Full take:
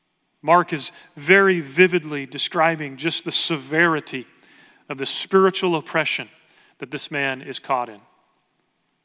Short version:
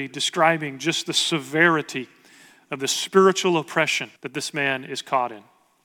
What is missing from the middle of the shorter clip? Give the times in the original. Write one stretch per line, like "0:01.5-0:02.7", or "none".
0:06.3-0:06.7